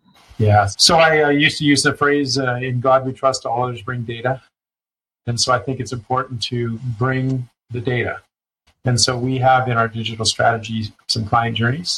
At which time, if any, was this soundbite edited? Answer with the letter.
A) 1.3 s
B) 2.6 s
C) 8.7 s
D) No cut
C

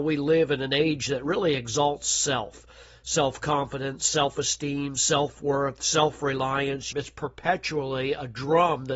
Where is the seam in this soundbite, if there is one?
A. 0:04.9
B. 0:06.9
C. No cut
B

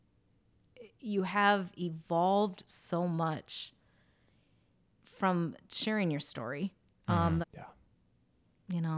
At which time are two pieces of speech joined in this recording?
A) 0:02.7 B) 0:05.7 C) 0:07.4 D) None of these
C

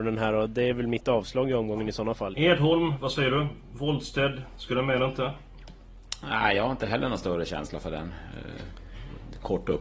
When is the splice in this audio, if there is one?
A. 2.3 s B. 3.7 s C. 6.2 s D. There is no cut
A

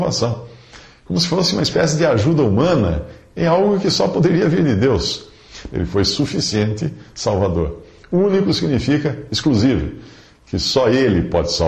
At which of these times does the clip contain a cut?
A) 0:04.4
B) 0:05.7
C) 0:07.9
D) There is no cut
B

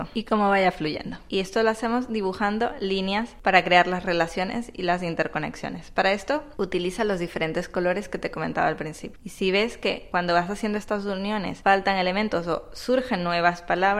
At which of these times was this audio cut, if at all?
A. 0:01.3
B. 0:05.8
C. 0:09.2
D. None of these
A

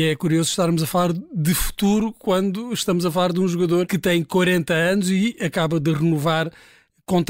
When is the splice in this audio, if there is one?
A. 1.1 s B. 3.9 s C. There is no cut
B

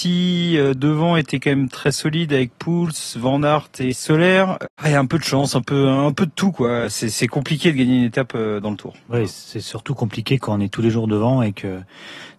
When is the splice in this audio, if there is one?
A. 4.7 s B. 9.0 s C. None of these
B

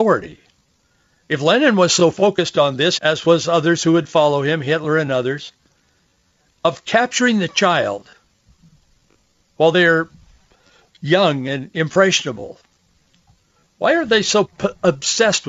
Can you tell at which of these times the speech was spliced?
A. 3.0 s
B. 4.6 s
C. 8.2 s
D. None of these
A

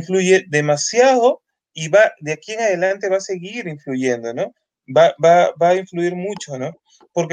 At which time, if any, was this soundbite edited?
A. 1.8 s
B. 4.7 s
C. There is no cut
B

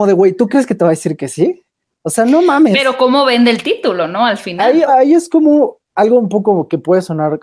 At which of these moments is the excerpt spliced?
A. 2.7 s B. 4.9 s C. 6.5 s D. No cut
B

